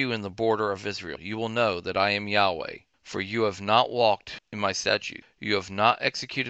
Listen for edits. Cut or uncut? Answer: uncut